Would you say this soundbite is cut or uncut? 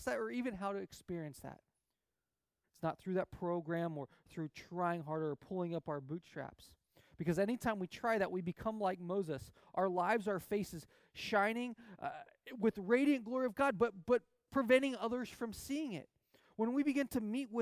cut